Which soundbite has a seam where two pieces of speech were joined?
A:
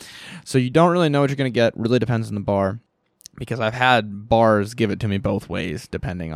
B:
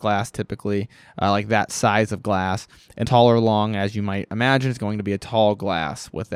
B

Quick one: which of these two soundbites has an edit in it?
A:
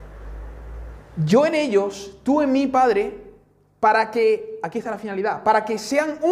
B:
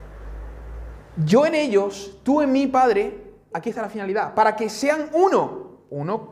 B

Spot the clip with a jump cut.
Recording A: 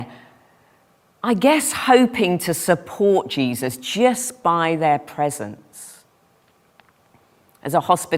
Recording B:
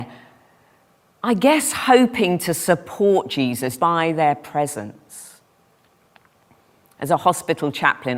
B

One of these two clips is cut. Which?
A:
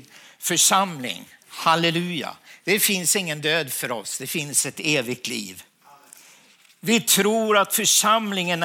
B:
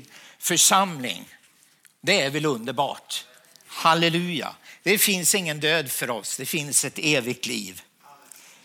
A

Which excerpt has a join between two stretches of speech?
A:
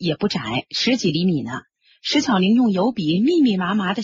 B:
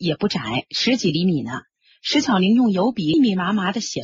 B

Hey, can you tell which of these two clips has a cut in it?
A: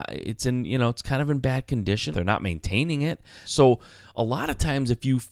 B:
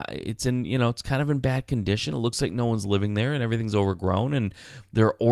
A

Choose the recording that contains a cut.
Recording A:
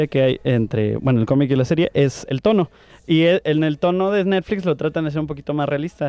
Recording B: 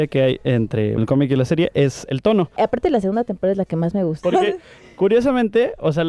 B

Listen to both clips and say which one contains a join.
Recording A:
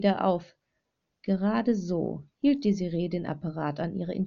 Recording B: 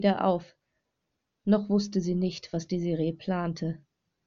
A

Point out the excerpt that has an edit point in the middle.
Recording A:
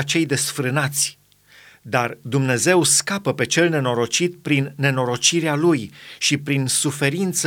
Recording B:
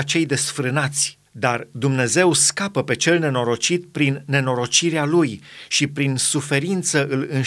B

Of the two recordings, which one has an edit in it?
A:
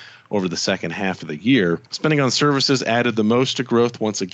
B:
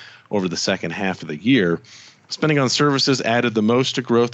A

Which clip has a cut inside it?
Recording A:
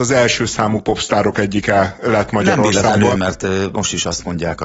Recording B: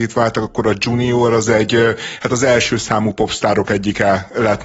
A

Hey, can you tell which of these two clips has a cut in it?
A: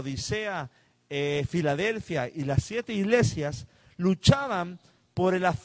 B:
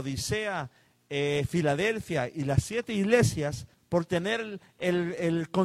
B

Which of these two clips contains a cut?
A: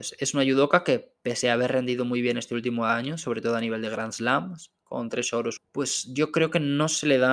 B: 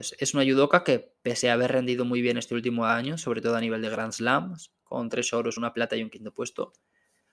A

